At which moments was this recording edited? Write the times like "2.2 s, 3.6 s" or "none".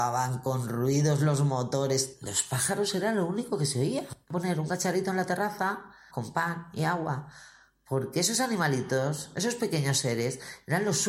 4.2 s, 6.1 s